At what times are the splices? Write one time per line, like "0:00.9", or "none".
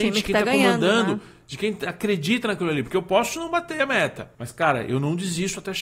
0:04.3